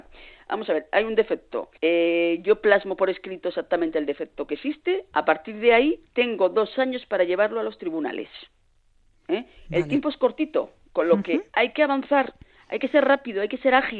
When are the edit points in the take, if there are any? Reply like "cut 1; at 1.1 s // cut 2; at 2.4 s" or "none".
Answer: cut 1; at 1.8 s // cut 2; at 6.0 s

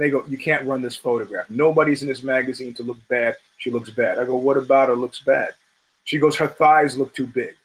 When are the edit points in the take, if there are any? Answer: none

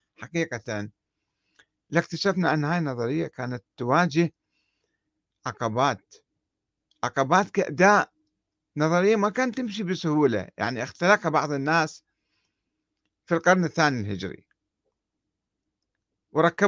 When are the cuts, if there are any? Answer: none

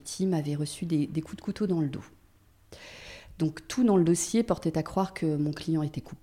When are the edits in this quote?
none

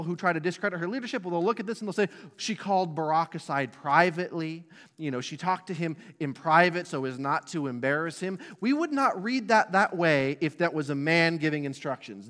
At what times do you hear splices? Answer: none

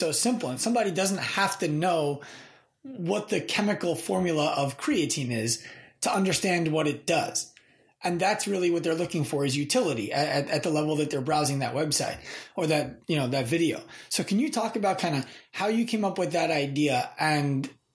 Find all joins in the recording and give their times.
none

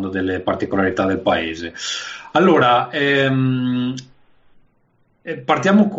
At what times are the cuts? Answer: none

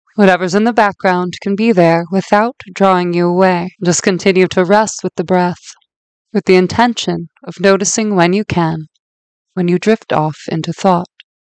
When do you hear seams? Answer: cut 1; at 3.7 s // cut 2; at 6.2 s

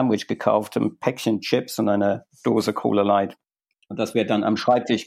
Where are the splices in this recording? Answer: none

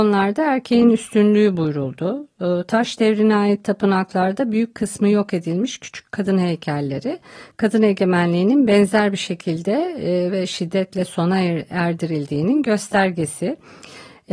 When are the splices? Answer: none

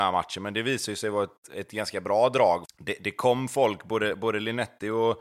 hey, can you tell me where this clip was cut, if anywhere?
cut 1; at 2.6 s

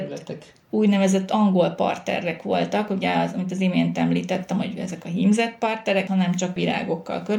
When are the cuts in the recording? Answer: cut 1; at 6.1 s

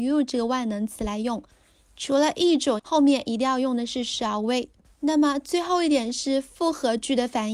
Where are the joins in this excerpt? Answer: cut 1; at 2.8 s // cut 2; at 4.8 s

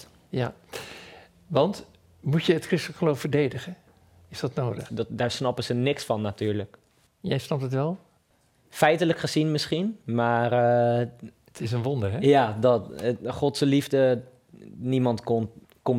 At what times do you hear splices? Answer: cut 1; at 4.9 s

